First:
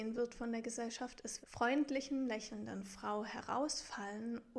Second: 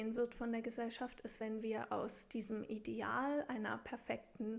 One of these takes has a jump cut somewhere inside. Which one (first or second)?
first